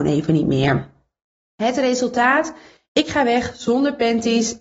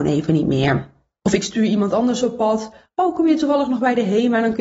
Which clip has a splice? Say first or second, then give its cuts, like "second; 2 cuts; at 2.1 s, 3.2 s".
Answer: second; 1 cut; at 1.2 s